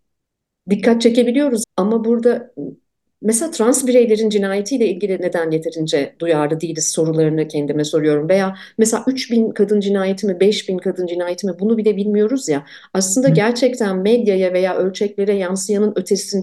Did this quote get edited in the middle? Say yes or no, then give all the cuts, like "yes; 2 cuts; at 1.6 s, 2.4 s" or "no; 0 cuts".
yes; 1 cut; at 1.6 s